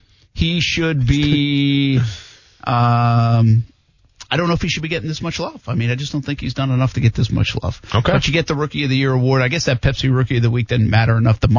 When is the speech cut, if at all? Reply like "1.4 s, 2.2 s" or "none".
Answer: none